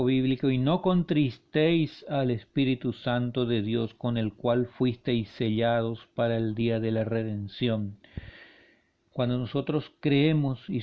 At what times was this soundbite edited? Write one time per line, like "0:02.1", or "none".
none